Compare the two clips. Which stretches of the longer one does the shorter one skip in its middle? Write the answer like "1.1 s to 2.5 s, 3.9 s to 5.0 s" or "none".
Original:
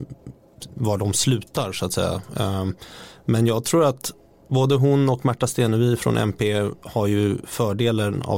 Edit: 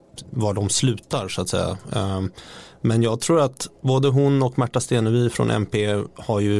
4.2 s to 4.4 s